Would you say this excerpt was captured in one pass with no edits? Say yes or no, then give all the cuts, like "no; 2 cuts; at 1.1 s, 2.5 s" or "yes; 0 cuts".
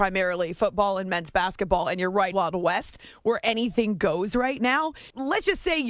no; 1 cut; at 2.3 s